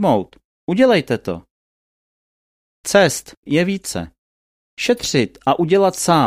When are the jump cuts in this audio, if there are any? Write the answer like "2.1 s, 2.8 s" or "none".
3.4 s